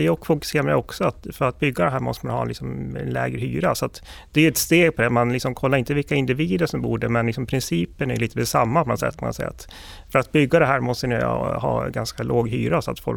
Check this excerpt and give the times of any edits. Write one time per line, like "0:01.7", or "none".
none